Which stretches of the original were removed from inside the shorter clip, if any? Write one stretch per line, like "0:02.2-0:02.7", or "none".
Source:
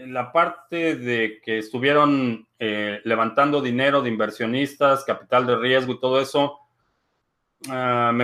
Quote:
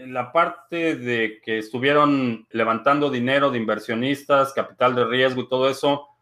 0:02.5-0:03.0